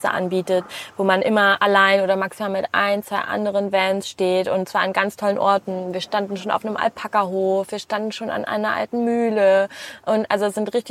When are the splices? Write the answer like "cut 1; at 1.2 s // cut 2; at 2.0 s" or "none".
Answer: none